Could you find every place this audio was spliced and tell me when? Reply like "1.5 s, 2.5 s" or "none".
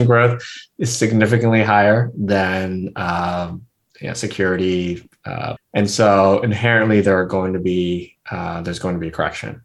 5.6 s